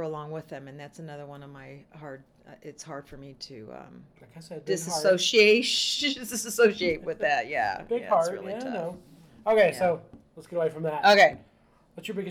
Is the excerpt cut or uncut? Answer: uncut